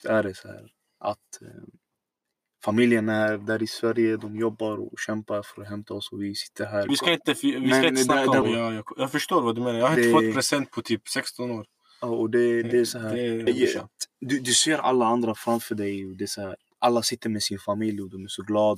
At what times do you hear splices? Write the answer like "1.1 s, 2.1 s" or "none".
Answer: 6.9 s, 8.4 s, 13.5 s